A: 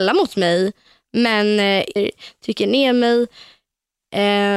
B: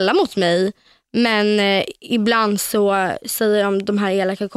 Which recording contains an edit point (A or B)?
A